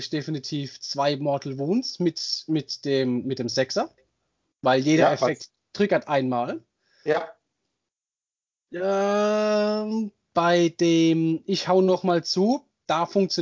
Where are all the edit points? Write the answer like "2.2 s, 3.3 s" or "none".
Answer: none